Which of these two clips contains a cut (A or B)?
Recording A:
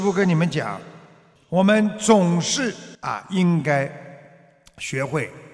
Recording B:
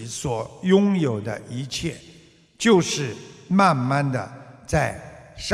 A